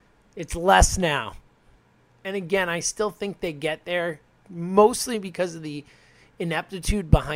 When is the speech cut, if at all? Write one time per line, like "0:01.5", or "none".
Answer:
none